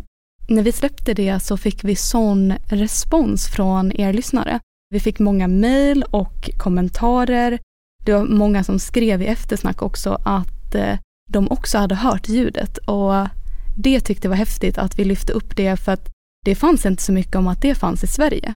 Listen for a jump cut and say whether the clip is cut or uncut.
uncut